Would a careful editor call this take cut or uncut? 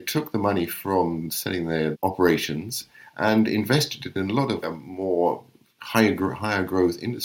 cut